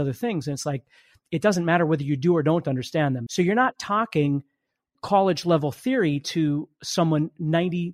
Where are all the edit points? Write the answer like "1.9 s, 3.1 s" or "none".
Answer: 3.3 s